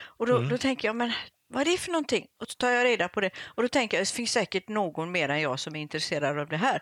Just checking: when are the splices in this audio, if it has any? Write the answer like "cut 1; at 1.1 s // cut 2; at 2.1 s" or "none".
none